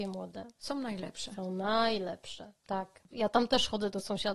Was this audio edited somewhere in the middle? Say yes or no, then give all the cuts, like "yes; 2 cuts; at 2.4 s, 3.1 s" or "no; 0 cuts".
yes; 1 cut; at 3.1 s